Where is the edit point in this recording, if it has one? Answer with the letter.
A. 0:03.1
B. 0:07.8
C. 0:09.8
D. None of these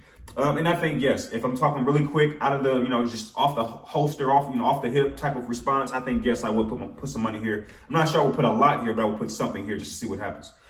D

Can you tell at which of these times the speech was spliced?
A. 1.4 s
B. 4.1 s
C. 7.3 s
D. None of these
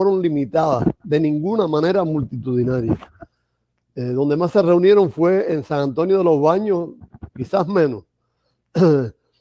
C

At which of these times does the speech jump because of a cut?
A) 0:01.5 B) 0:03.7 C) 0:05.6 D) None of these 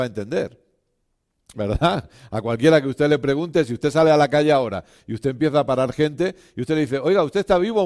A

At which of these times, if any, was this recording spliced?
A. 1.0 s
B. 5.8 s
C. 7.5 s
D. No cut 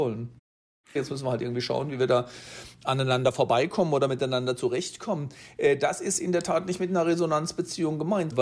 A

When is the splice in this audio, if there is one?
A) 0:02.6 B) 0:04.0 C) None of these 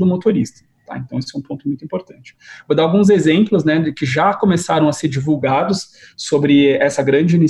C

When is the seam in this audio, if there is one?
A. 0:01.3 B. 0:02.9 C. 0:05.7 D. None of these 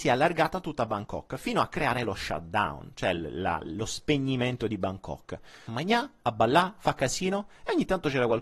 C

